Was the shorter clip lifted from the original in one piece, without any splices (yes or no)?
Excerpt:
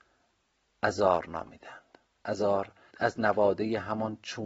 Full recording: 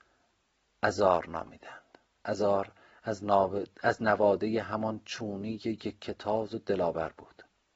no